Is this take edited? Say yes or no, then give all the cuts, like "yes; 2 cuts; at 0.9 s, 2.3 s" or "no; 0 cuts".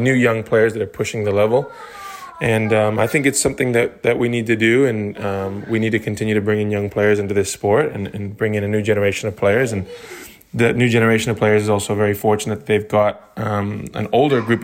no; 0 cuts